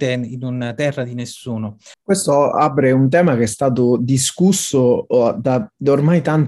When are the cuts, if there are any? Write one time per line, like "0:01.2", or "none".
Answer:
0:01.9